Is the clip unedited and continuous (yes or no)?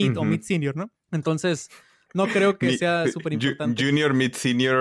yes